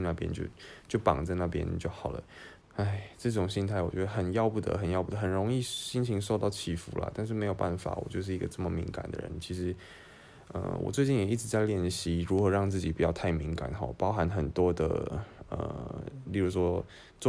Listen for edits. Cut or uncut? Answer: cut